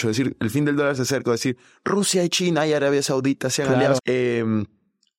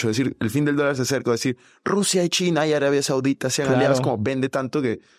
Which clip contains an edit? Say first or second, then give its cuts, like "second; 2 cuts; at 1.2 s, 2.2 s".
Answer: first; 1 cut; at 4.0 s